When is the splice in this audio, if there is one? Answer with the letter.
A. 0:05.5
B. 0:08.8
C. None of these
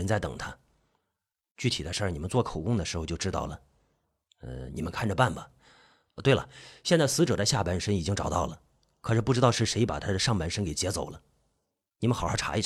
C